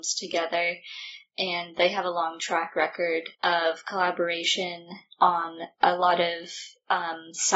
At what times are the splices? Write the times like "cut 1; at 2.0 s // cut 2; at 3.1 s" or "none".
cut 1; at 3.3 s